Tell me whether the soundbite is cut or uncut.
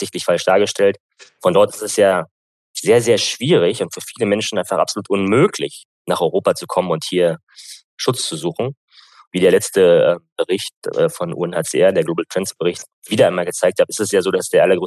uncut